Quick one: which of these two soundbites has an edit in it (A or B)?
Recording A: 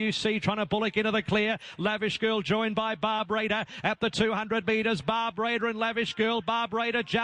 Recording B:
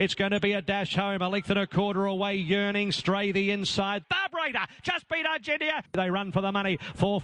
B